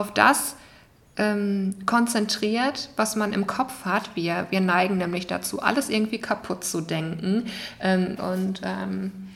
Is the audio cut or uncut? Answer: cut